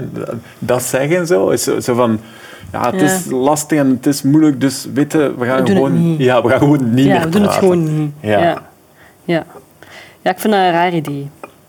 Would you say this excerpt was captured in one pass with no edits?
yes; 0 cuts

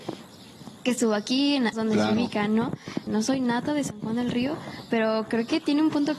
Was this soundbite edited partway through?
yes; 2 cuts; at 1.7 s, 3.1 s

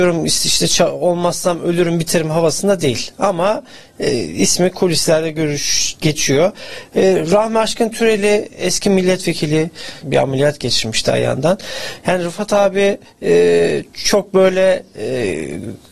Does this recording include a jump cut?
yes; 1 cut; at 10.0 s

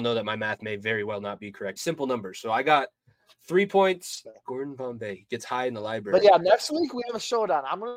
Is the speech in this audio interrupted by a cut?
yes; 2 cuts; at 1.8 s, 4.2 s

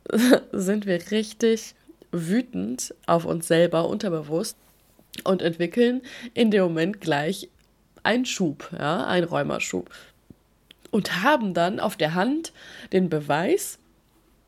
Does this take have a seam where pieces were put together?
yes; 1 cut; at 1.0 s

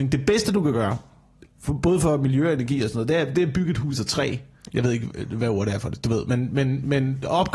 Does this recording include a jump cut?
yes; 1 cut; at 4.7 s

